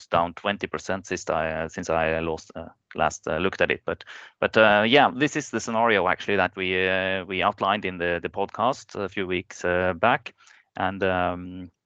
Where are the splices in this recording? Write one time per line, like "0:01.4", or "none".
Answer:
none